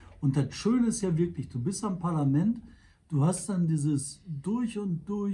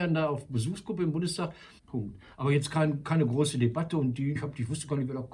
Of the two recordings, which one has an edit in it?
second; 2 cuts; at 1.8 s, 4.3 s

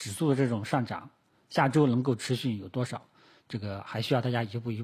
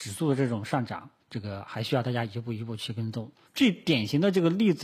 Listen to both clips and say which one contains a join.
second; 2 cuts; at 1.2 s, 3.4 s

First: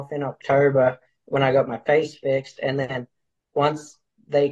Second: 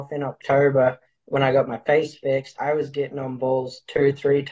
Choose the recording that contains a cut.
second; 1 cut; at 2.5 s

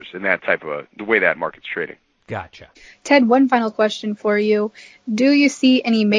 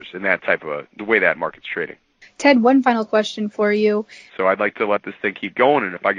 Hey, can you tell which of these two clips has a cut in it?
second; 2 cuts; at 2.2 s, 4.3 s

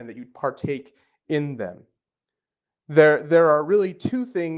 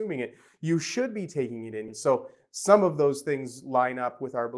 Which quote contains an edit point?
second; 1 cut; at 1.9 s

